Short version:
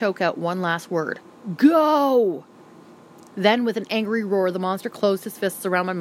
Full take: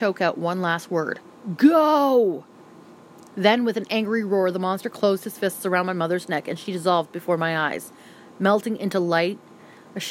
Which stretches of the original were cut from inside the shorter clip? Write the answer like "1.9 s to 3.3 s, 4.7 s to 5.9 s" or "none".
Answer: none